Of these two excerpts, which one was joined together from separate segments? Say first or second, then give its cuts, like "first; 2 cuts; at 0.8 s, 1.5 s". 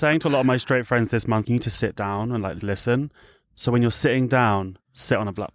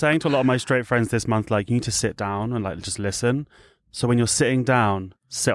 first; 2 cuts; at 1.4 s, 2.6 s